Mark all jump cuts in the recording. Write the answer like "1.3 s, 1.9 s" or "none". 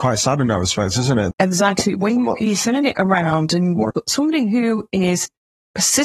1.3 s, 3.9 s